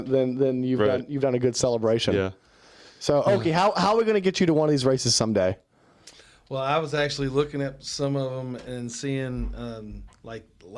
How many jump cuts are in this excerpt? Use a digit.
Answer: 0